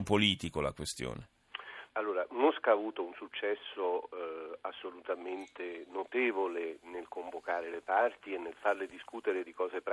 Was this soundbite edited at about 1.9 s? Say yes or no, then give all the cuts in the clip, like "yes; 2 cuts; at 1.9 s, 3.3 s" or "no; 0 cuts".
yes; 1 cut; at 1.9 s